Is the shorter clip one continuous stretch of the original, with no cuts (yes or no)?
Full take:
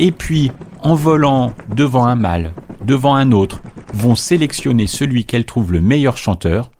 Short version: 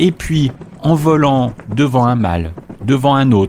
yes